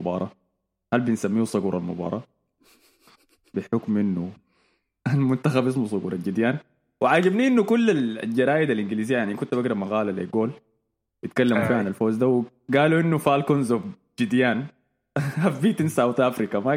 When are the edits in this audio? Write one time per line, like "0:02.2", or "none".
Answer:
none